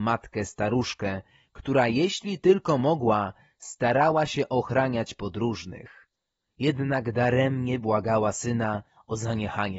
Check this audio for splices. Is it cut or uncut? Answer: uncut